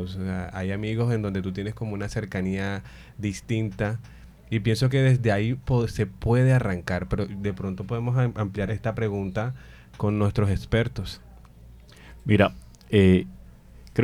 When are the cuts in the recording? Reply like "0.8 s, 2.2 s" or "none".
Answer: 8.7 s